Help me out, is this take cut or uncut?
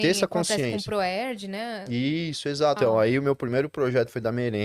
cut